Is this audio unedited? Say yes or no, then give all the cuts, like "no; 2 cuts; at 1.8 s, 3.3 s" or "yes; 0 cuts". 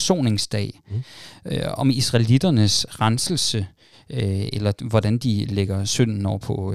yes; 0 cuts